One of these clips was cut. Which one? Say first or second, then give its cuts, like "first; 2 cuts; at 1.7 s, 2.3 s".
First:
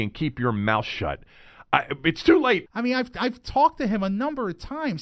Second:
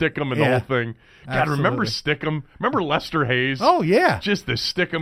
first; 1 cut; at 2.7 s